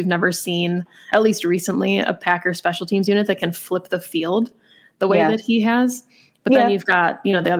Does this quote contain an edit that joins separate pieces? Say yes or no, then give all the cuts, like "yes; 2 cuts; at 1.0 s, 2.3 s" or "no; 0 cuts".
no; 0 cuts